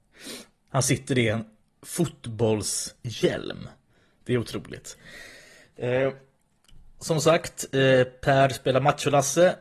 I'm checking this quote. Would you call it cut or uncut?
cut